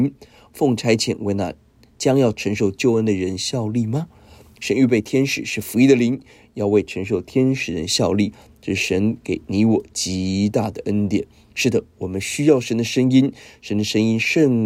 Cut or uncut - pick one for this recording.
uncut